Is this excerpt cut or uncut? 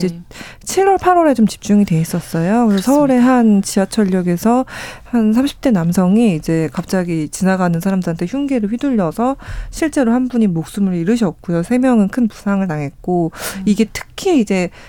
uncut